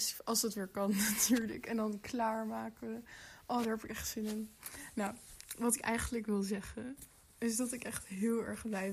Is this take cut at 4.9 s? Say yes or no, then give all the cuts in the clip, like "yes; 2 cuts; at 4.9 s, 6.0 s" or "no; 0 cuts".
no; 0 cuts